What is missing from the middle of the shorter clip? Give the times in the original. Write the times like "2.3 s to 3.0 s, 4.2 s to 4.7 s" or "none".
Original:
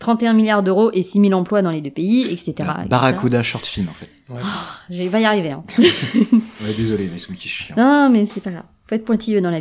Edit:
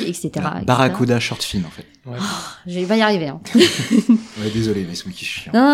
none